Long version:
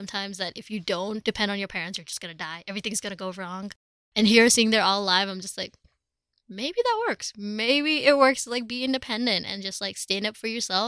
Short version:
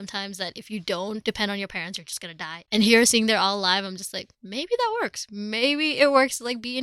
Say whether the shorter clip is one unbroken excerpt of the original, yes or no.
no